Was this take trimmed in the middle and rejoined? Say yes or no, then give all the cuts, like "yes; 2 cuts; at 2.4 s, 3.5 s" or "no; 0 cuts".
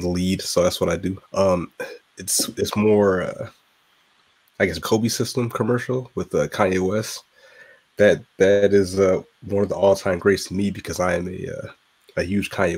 yes; 2 cuts; at 1.2 s, 4.8 s